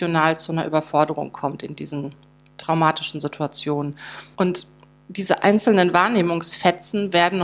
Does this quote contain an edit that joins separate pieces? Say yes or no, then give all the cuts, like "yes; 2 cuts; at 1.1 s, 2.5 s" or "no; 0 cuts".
yes; 1 cut; at 4.3 s